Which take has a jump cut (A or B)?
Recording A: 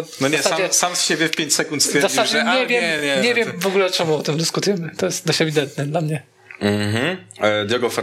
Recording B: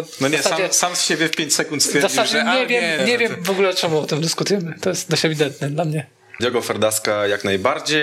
B